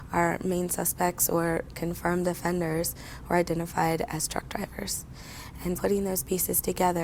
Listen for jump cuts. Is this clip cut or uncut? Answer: cut